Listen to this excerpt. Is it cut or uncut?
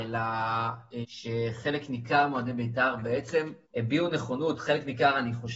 cut